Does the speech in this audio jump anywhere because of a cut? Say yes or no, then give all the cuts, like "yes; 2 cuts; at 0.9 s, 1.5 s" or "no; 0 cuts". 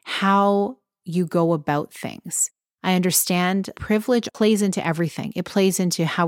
yes; 1 cut; at 3.7 s